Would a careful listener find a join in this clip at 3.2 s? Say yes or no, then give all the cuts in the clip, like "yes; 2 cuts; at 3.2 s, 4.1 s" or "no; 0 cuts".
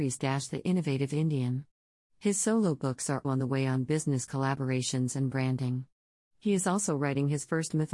yes; 1 cut; at 3.2 s